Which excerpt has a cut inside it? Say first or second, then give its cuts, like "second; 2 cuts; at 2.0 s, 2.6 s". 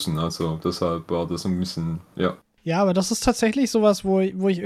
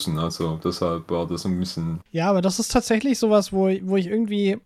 second; 1 cut; at 2.0 s